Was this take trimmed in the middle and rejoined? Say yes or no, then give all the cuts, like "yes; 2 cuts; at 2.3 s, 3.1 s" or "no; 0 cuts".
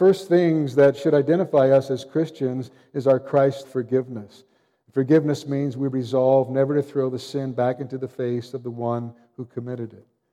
yes; 1 cut; at 3.6 s